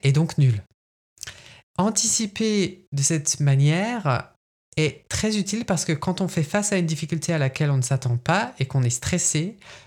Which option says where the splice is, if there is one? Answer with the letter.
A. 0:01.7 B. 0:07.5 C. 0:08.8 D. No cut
A